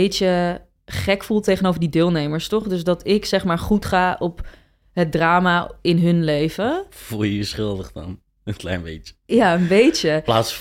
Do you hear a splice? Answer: no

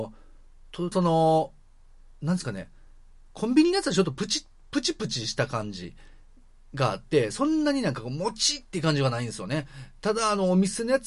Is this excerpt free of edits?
no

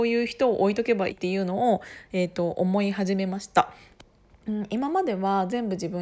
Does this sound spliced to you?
yes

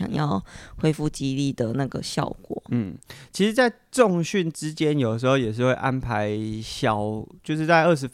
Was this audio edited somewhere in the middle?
yes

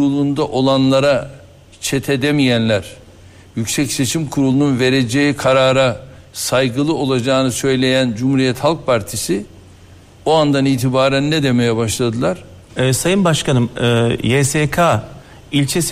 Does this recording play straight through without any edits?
no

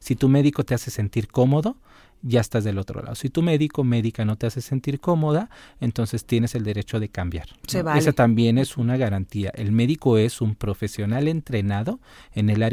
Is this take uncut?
yes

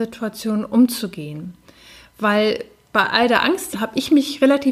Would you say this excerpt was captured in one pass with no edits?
no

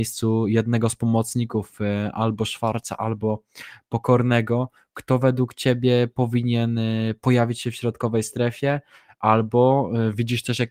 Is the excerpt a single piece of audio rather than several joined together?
yes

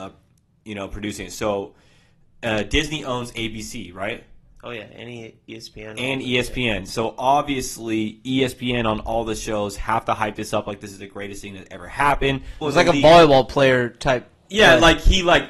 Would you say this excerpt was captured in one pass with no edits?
no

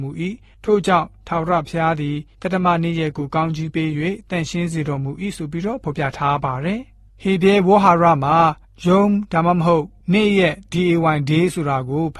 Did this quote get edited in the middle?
no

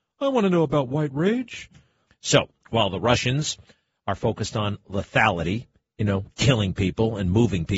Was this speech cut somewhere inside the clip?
yes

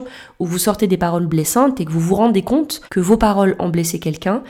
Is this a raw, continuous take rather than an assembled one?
no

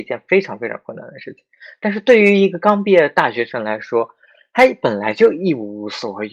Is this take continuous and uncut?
yes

